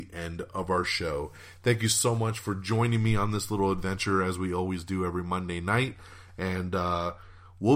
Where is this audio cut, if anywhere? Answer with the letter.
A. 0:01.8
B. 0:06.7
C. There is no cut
C